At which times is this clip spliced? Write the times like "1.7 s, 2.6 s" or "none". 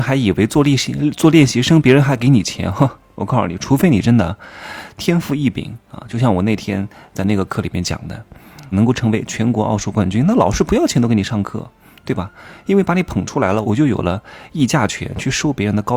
8.7 s, 13.6 s